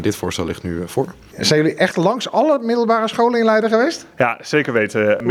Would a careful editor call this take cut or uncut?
uncut